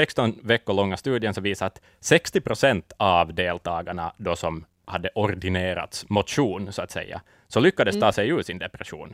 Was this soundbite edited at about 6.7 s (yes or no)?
no